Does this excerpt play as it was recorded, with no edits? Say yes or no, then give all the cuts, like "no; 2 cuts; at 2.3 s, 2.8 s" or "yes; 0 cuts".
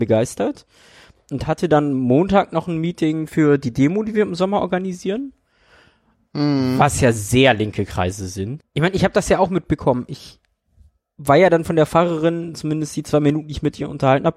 no; 1 cut; at 8.6 s